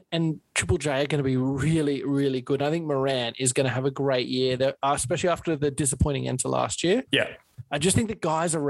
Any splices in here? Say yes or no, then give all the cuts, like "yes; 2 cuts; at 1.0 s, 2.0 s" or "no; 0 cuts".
yes; 1 cut; at 7.1 s